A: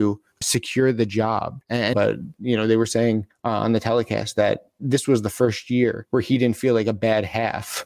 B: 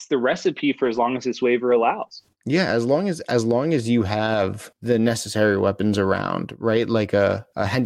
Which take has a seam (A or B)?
A